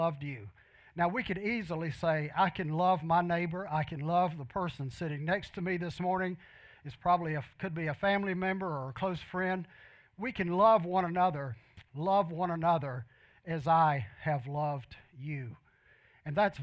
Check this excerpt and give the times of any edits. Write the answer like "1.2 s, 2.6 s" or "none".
11.9 s